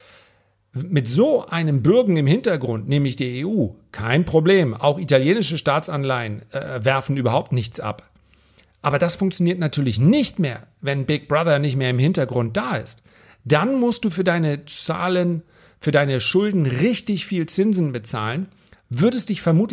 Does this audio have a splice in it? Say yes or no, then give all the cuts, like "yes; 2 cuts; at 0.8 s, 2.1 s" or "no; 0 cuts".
no; 0 cuts